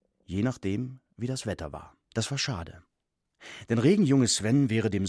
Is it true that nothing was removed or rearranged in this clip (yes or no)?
no